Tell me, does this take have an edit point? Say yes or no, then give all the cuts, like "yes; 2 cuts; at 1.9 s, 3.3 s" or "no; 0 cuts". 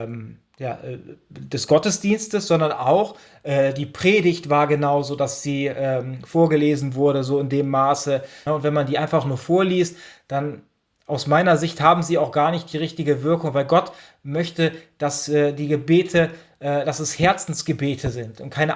yes; 1 cut; at 8.5 s